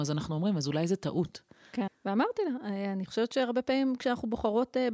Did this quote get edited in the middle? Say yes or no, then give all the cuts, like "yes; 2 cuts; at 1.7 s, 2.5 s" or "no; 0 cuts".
yes; 1 cut; at 1.9 s